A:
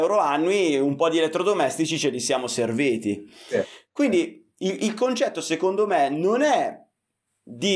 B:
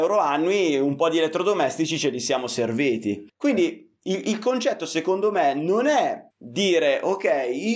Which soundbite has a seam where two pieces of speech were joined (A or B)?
B